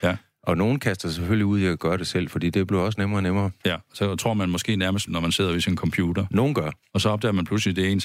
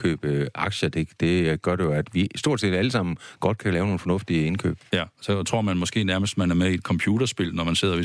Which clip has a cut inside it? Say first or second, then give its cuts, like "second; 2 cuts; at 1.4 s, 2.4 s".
first; 2 cuts; at 3.6 s, 5.1 s